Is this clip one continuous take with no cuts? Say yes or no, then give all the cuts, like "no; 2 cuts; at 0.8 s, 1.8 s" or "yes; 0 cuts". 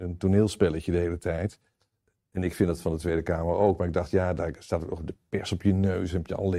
yes; 0 cuts